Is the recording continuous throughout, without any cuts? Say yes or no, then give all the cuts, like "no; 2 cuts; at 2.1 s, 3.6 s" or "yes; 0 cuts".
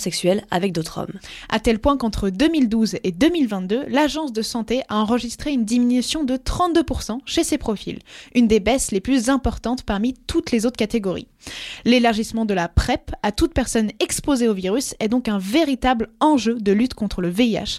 yes; 0 cuts